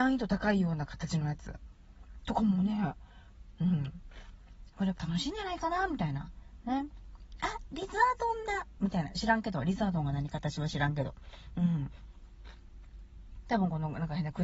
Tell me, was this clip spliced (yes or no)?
yes